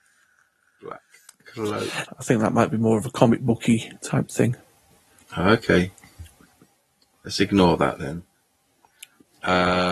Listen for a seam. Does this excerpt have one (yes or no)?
yes